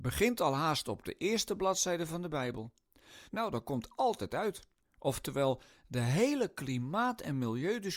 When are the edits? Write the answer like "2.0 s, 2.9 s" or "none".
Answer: 3.3 s, 4.8 s